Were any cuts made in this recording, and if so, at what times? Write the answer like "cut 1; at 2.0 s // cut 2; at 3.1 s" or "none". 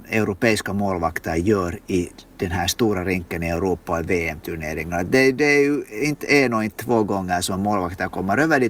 none